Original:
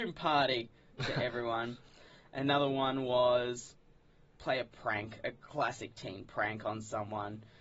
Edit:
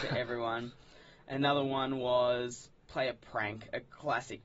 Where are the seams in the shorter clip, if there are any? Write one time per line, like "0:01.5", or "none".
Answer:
0:02.8